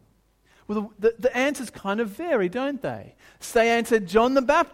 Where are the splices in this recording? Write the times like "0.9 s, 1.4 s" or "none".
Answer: none